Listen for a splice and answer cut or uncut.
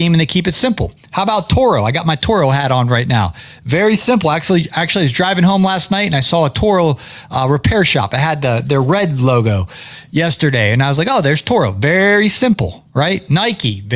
uncut